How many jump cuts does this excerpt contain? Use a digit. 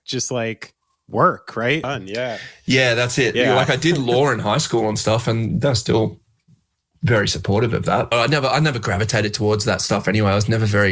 3